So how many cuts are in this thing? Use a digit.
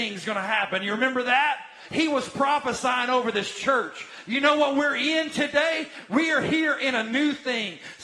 1